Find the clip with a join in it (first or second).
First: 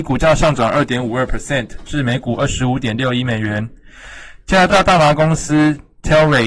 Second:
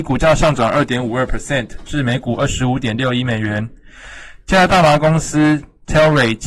second